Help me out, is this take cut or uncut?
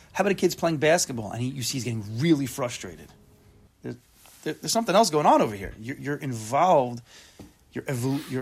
cut